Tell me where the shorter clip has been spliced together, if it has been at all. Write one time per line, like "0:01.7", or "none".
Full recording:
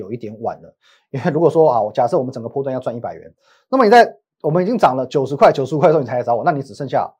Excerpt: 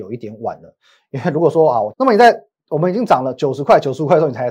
0:01.9